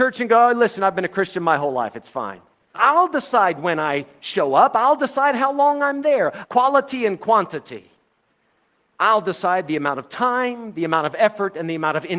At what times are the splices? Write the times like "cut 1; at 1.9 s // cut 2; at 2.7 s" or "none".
cut 1; at 2.7 s // cut 2; at 6.4 s